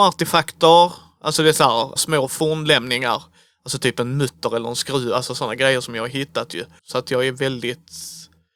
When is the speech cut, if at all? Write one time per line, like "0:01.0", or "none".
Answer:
0:02.0
0:06.8